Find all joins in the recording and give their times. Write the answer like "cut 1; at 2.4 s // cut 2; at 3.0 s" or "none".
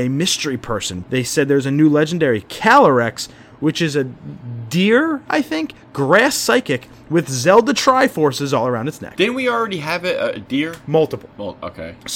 cut 1; at 1.0 s